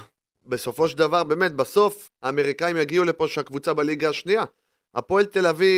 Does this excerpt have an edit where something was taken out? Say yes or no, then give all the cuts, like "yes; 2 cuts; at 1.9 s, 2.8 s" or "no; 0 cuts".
yes; 1 cut; at 2.1 s